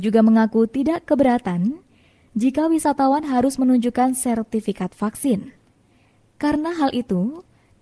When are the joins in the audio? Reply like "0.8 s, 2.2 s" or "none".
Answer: none